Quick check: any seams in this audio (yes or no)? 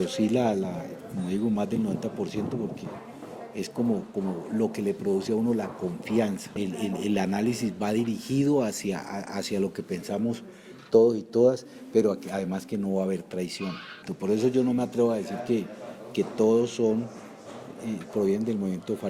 yes